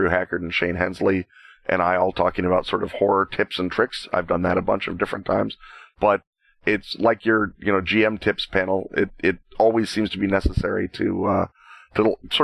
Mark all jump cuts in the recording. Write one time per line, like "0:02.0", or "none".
none